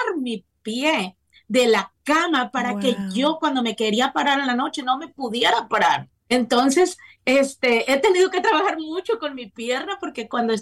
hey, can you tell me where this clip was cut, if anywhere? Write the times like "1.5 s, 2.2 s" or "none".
6.1 s